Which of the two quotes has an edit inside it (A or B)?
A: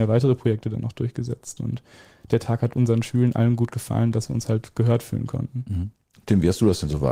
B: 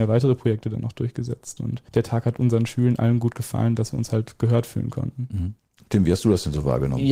B